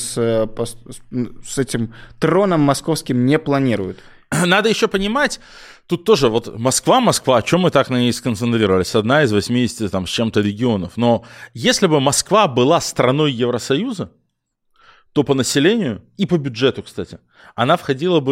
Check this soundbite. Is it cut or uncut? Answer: uncut